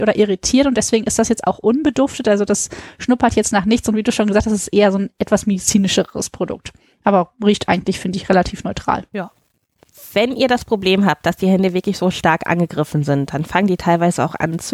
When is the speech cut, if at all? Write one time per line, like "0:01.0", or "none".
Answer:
none

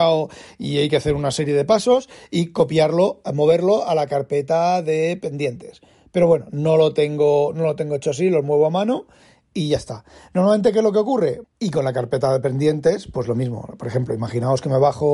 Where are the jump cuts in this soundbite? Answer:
0:11.4

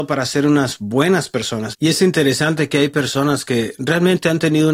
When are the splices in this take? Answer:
0:01.7

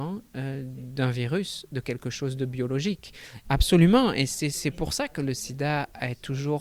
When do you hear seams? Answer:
0:03.4

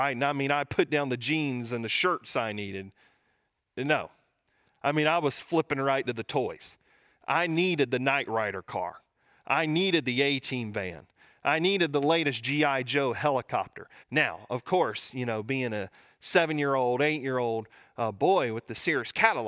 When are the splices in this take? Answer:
0:14.0

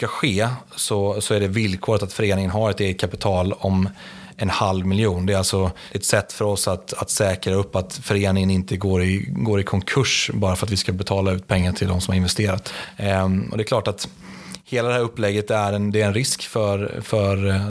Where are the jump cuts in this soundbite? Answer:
none

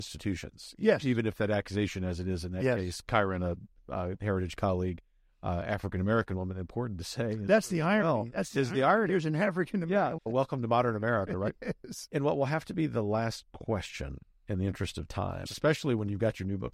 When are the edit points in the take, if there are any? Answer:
0:10.2
0:15.5

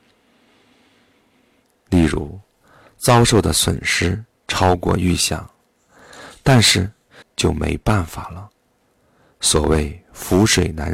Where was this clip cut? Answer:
0:07.2

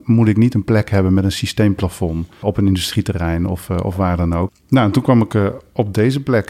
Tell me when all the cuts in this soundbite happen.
0:02.4
0:04.5

